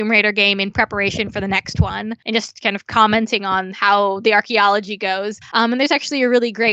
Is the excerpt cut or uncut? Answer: uncut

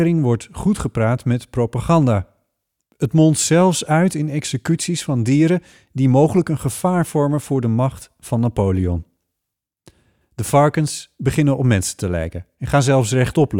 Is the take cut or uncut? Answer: uncut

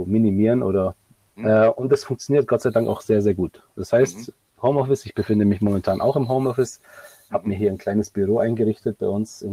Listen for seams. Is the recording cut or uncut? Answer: cut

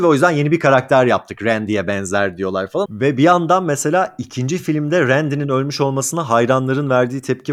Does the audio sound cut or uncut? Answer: cut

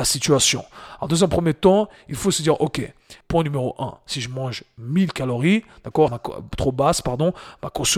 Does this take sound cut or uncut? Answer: cut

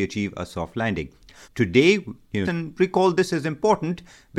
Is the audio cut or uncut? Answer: cut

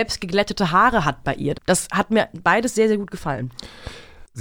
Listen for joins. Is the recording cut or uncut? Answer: cut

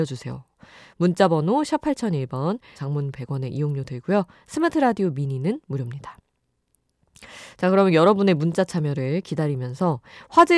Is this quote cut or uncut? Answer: cut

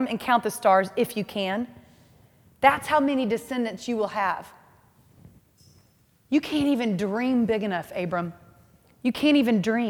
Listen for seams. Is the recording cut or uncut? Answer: uncut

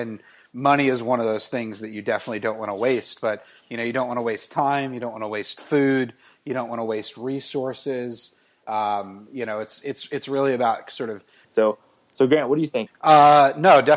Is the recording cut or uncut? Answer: cut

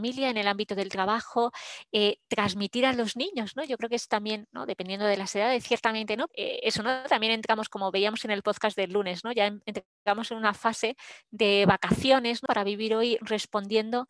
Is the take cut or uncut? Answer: cut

